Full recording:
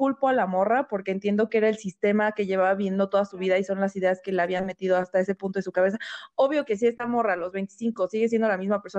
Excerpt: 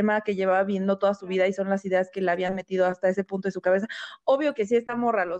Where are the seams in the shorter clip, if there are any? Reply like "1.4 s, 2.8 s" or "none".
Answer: none